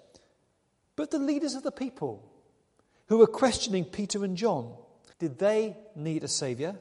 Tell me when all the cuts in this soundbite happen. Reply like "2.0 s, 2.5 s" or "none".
5.1 s